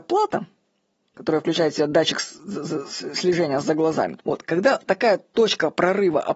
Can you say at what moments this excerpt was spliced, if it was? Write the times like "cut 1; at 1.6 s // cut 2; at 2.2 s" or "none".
cut 1; at 4.2 s